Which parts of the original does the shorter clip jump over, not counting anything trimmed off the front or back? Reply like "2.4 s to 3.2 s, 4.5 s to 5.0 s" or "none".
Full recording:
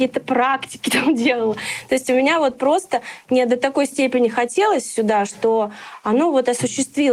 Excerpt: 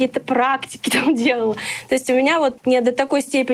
2.6 s to 3.2 s